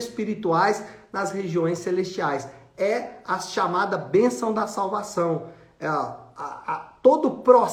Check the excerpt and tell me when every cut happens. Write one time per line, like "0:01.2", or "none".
none